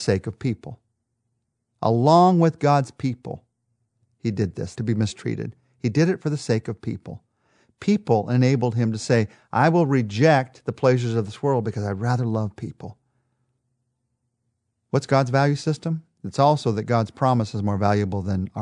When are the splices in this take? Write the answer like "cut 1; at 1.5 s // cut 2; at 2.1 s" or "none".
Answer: cut 1; at 4.7 s